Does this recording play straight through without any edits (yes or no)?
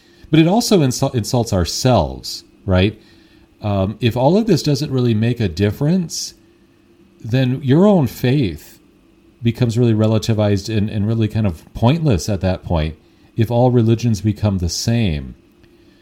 no